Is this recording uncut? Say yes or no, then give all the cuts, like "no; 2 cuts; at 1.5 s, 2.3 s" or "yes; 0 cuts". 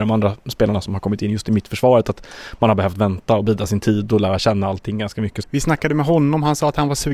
no; 1 cut; at 5.4 s